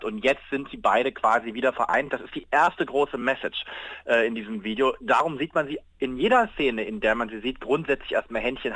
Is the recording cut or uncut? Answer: uncut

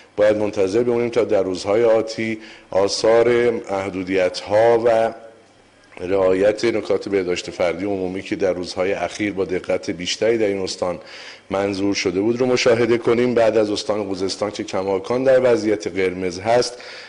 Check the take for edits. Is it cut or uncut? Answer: uncut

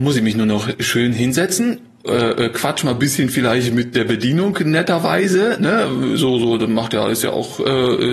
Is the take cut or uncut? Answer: uncut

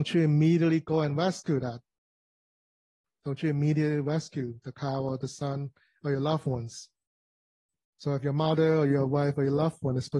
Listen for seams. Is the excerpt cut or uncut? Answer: cut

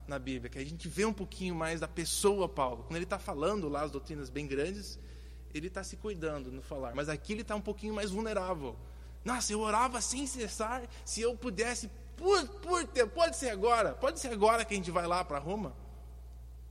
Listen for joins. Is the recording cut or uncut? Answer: uncut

